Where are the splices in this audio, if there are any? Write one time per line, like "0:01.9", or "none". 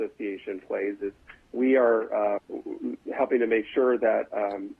0:02.4